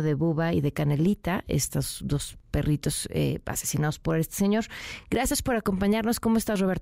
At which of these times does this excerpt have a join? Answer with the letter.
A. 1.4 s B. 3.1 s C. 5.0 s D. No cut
D